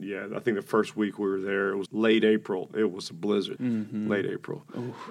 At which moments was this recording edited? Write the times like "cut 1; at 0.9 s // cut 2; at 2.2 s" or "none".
cut 1; at 1.9 s // cut 2; at 3.6 s